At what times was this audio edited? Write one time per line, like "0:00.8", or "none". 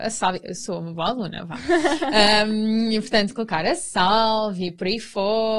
none